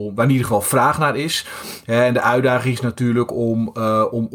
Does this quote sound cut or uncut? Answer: uncut